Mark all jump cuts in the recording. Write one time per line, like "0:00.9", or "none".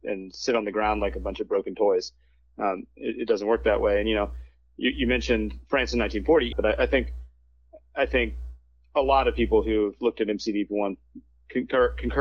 0:06.5